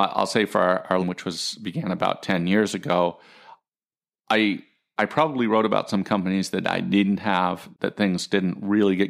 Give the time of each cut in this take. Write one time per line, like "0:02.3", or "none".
0:01.0
0:07.7